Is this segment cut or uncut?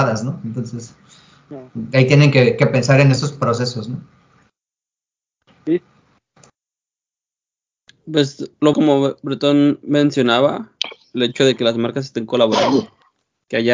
cut